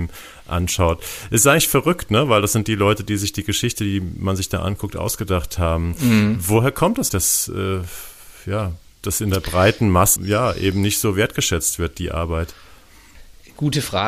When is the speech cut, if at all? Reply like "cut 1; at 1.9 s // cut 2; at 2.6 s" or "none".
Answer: cut 1; at 7.1 s // cut 2; at 10.2 s